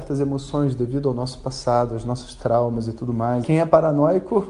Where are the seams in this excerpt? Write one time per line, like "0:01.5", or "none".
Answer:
0:03.4